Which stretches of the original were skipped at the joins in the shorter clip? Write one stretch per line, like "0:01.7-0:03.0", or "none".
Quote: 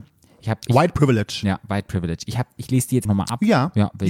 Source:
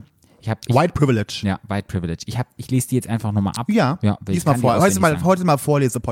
0:03.1-0:03.3

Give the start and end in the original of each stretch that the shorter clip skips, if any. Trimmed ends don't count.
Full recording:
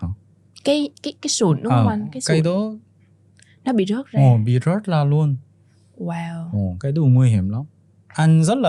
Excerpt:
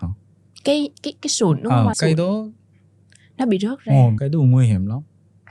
0:01.9-0:02.2
0:04.5-0:06.8

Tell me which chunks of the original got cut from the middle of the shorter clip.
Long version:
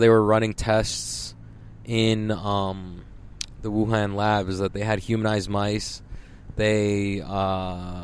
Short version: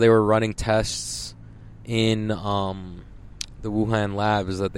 none

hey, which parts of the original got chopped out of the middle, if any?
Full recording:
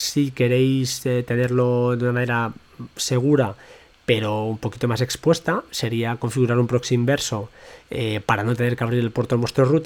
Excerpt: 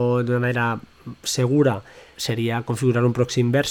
0:03.9-0:05.7

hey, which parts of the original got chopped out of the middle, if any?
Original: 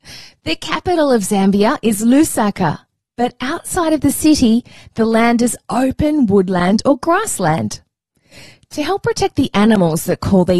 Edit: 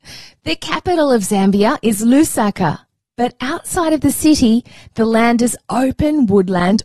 none

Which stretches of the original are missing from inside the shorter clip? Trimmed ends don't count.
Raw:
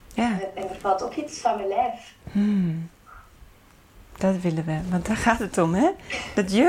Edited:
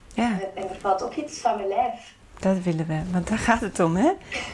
0:02.2-0:04.0

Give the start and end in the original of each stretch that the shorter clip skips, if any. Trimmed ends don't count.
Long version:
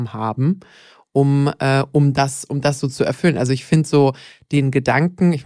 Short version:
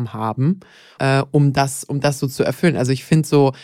0:01.0-0:01.6

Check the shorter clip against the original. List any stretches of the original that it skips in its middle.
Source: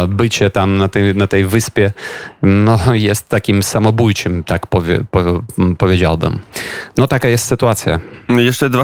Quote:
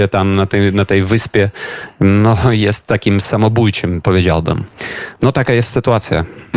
0:04.4-0:05.8

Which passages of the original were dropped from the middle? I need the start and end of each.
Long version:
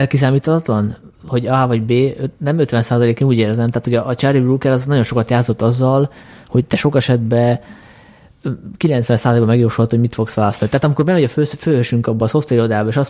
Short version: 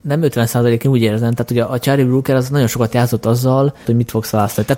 0:06.2-0:09.9

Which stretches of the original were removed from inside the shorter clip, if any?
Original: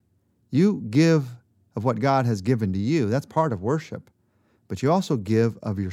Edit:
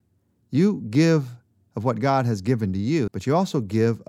0:03.1-0:04.6

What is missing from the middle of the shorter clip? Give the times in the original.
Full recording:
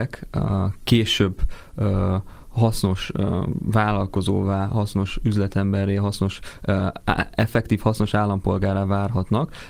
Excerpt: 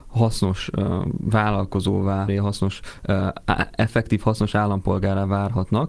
0:04.7-0:05.9

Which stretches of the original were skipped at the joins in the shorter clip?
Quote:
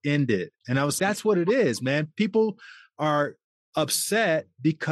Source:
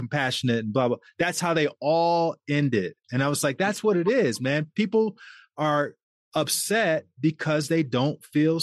0:03.4-0:03.6

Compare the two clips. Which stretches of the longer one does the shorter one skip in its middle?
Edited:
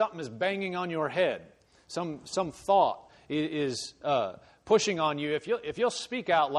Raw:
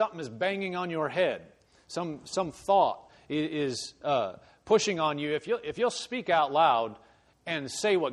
none

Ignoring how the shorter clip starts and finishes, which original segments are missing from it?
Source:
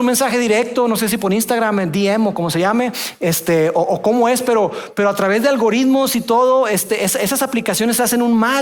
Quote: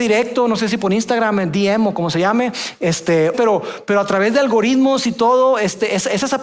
0:03.7-0:04.4

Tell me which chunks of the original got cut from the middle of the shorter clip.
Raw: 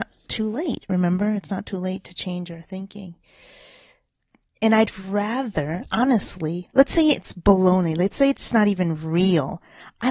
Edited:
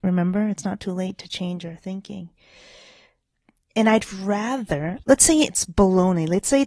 0:05.9-0:06.7

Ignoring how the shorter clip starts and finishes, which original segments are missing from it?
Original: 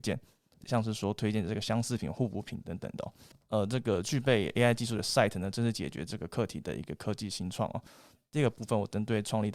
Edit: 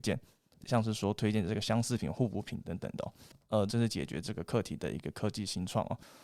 0:03.7-0:05.5

